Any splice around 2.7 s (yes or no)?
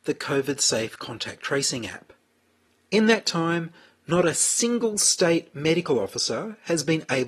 no